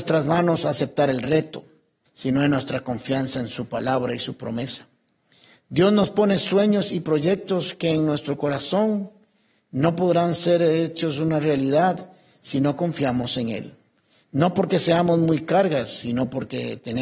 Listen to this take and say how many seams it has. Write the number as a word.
one